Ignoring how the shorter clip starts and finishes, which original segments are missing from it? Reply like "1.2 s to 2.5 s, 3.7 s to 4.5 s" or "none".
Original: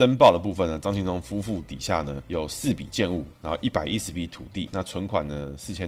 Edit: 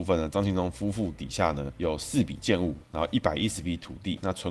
none